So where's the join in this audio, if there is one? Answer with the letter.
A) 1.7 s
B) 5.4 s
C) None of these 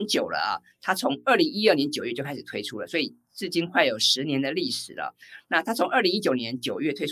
C